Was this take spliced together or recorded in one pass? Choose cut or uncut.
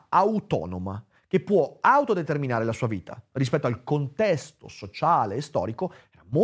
uncut